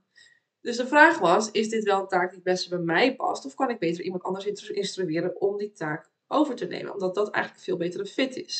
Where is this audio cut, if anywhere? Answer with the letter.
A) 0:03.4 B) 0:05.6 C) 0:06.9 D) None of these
D